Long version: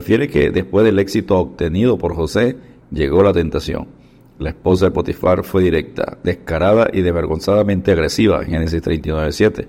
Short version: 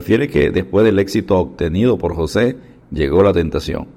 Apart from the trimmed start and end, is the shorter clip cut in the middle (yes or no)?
no